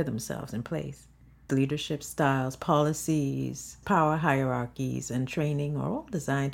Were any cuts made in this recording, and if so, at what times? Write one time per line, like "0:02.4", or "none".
0:01.5
0:03.8